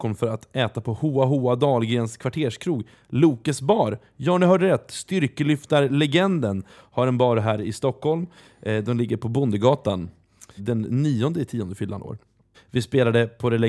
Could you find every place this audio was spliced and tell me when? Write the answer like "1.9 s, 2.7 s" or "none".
10.6 s, 12.5 s